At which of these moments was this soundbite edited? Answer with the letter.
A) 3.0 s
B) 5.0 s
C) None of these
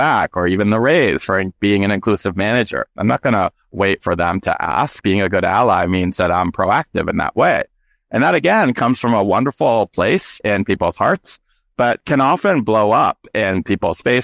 A